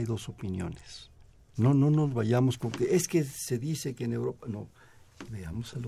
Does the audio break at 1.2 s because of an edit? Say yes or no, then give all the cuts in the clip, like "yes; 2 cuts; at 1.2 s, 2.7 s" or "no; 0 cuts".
no; 0 cuts